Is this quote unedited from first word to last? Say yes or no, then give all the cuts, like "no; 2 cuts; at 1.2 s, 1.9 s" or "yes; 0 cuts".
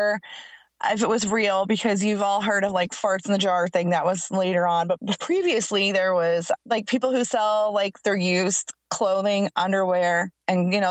yes; 0 cuts